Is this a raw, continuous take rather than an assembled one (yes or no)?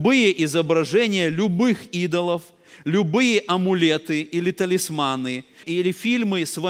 no